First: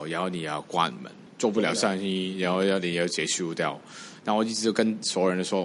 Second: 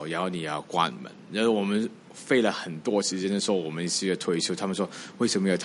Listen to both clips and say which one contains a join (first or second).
first